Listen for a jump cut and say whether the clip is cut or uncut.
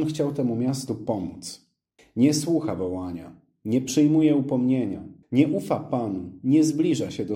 cut